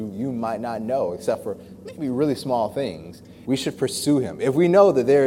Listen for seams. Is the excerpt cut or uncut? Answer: cut